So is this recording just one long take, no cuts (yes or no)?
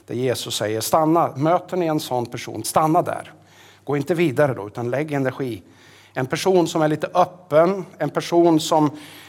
no